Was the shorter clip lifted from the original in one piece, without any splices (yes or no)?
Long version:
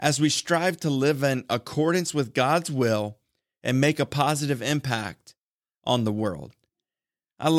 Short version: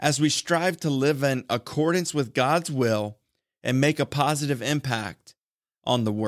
yes